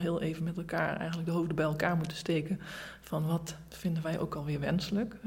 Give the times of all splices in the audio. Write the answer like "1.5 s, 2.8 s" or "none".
none